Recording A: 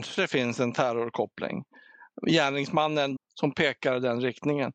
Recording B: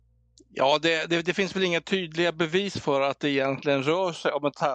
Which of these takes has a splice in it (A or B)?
A